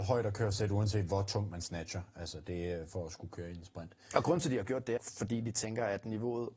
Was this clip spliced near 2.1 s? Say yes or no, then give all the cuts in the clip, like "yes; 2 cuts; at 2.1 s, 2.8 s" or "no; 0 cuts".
no; 1 cut; at 5.0 s